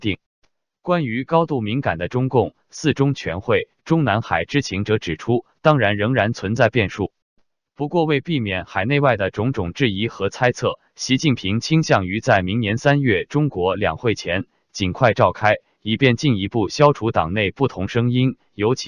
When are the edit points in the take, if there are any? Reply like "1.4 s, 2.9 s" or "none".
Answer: none

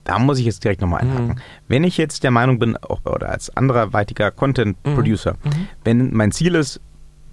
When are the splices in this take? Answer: 3.1 s

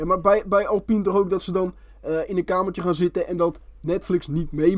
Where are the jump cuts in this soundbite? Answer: none

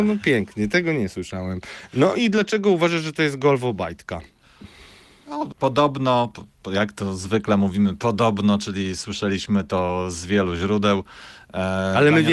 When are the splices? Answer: 5.5 s

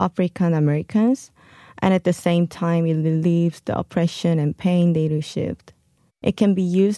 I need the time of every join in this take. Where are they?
6.1 s

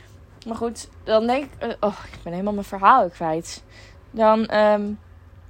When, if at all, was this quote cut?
none

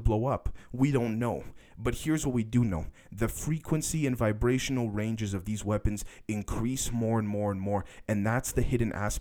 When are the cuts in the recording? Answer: none

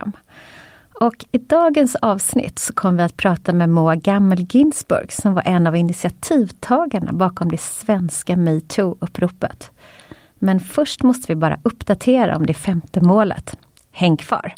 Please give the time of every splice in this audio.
none

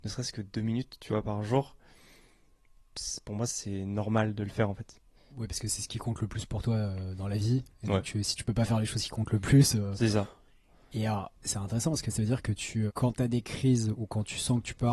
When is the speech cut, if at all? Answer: 5.3 s, 12.9 s

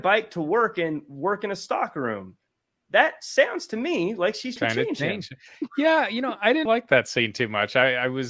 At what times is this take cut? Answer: 4.6 s, 6.7 s

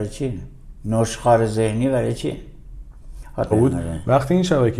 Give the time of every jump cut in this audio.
3.5 s

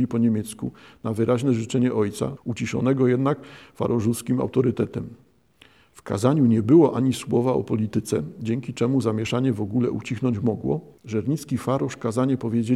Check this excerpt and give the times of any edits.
2.4 s, 11.0 s

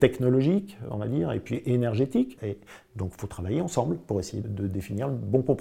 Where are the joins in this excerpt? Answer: 2.4 s, 4.4 s

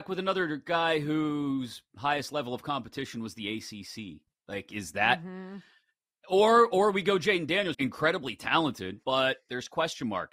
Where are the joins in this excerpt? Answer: 7.7 s, 9.0 s

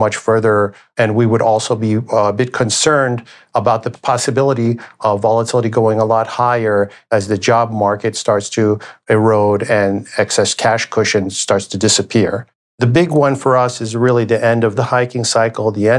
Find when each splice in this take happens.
12.7 s

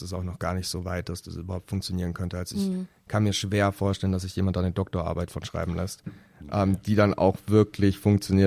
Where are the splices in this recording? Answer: none

